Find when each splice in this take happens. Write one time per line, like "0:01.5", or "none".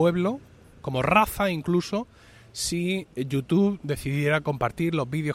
none